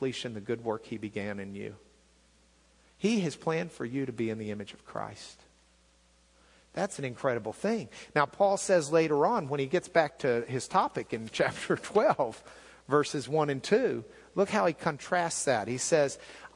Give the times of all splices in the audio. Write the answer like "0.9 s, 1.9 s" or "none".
none